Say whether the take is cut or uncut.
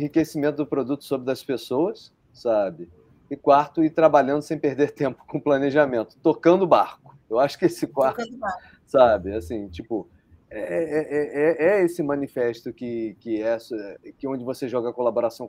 uncut